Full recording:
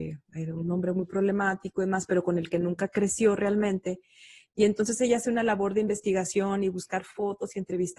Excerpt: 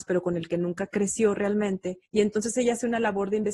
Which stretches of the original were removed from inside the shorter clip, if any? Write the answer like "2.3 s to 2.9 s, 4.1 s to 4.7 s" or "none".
4.1 s to 4.5 s